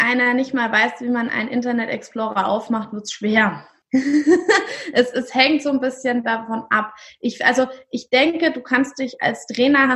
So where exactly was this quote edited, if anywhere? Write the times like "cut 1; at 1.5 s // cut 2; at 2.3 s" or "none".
cut 1; at 3.8 s